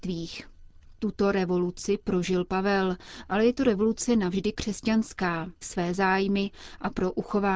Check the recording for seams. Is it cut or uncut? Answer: cut